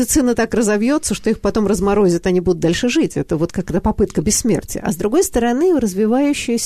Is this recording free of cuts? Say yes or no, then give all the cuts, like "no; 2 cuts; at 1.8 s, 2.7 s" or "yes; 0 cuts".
yes; 0 cuts